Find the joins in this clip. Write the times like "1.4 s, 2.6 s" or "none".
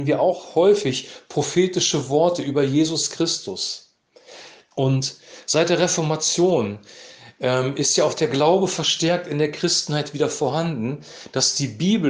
4.7 s